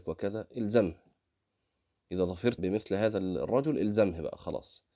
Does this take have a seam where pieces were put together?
yes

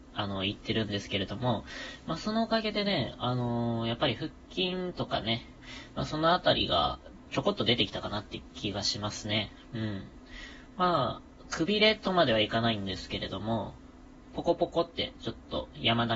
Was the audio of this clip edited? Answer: no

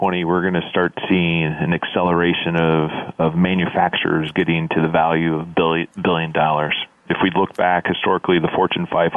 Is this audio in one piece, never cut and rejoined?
yes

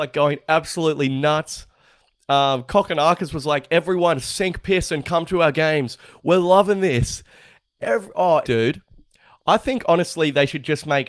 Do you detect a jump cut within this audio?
yes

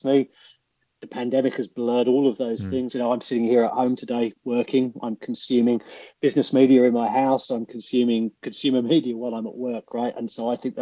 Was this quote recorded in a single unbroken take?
yes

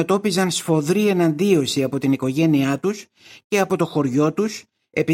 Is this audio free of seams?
yes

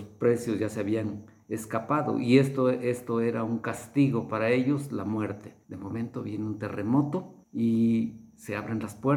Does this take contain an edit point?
yes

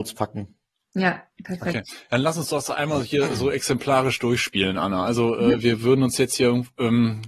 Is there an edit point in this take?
no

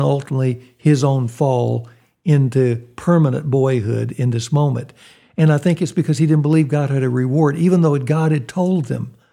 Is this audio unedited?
yes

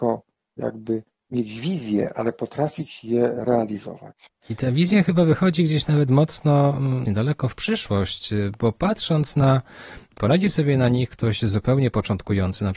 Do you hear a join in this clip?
yes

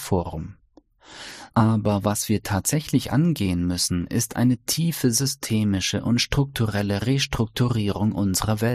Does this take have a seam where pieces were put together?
yes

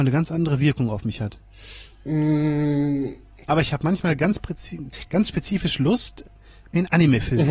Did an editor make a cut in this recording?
yes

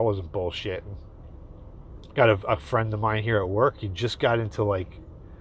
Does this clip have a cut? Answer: yes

